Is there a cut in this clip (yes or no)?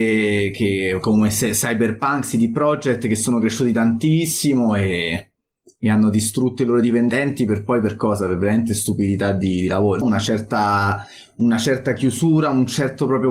yes